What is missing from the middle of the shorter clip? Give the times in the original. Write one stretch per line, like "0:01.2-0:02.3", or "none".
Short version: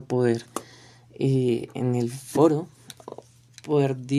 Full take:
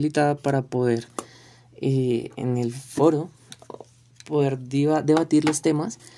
none